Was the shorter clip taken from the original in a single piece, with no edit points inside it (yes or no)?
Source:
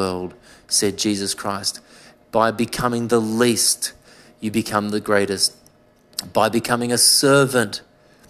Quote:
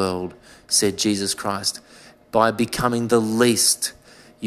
yes